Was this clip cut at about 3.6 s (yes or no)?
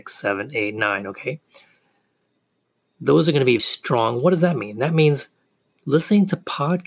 yes